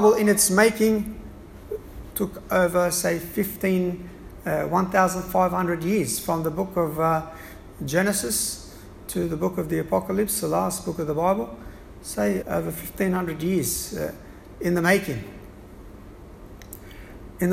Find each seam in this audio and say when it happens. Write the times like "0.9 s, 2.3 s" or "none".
12.4 s